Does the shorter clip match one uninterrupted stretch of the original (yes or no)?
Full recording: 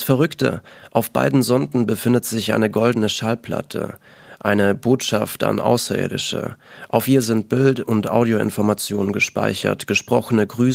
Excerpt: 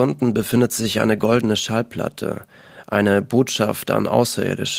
yes